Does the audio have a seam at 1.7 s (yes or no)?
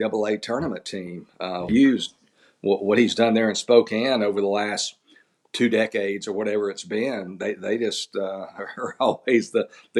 yes